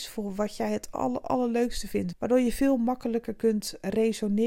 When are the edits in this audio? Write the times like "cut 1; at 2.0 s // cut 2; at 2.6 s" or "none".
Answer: cut 1; at 0.9 s // cut 2; at 2.1 s